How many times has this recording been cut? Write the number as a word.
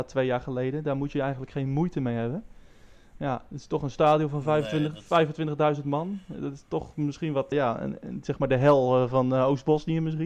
one